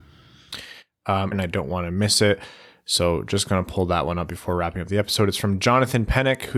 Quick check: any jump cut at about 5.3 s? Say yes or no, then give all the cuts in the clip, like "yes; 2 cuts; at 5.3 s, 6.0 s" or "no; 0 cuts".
no; 1 cut; at 1.3 s